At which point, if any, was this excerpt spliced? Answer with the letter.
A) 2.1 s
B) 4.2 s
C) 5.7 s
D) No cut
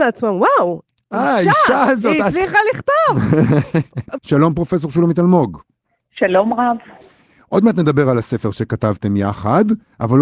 B